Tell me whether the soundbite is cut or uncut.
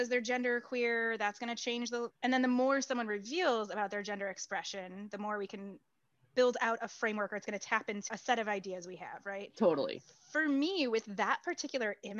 cut